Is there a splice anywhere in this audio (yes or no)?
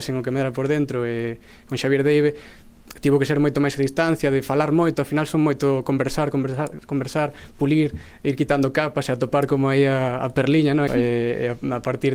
yes